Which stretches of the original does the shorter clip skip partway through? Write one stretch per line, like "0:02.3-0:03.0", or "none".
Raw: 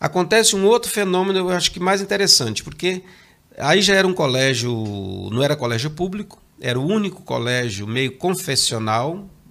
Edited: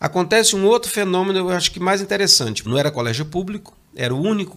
0:02.6-0:05.3

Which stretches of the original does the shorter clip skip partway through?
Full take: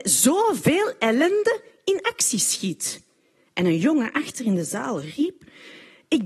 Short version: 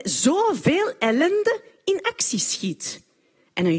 none

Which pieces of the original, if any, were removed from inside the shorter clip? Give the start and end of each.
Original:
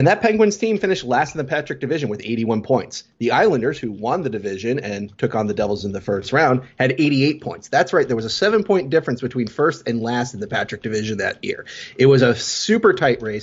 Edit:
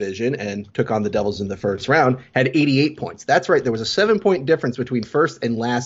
none

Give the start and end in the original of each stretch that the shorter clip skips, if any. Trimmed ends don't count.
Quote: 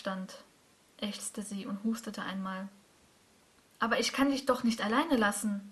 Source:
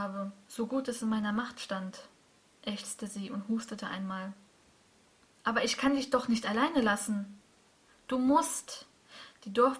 none

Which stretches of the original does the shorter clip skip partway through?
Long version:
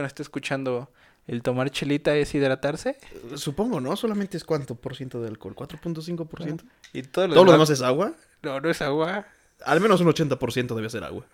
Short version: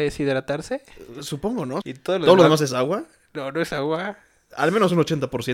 0:04.0-0:06.9

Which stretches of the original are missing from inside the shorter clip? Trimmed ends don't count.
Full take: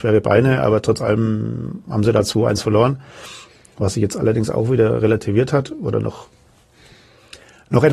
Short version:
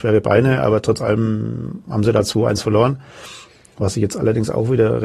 none

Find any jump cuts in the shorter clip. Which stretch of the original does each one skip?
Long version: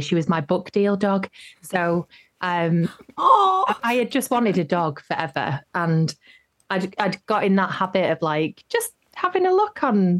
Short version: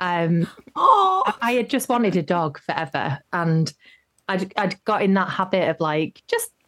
none

